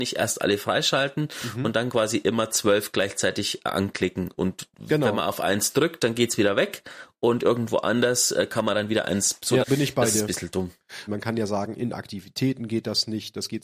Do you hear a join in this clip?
yes; 2 cuts; at 9.6 s, 11.1 s

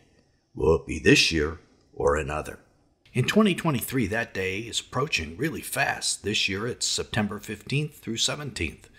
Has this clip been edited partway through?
no; 0 cuts

